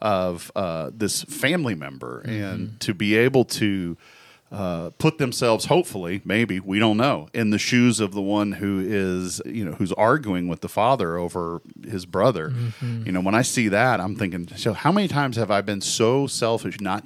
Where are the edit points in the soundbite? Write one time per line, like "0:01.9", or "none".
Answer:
0:09.4